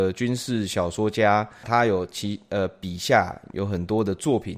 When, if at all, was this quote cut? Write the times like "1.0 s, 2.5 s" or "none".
1.6 s